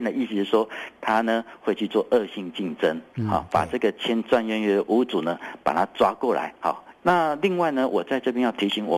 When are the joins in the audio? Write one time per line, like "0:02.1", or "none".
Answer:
0:07.0